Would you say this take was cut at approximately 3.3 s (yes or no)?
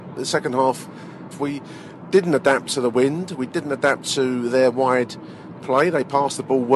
no